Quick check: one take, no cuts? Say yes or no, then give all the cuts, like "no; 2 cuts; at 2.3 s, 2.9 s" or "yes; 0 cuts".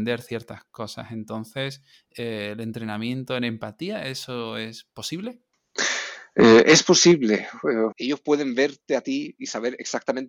no; 1 cut; at 7.9 s